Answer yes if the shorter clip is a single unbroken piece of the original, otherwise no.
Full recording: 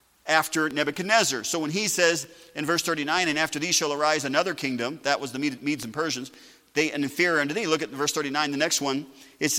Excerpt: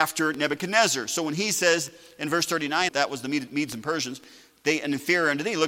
no